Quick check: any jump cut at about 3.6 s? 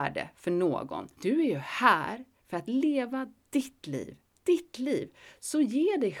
no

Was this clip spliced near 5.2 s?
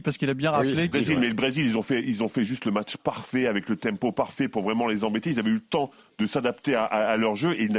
no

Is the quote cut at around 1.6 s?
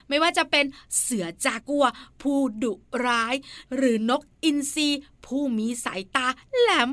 yes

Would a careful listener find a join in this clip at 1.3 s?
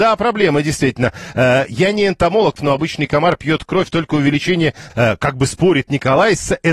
no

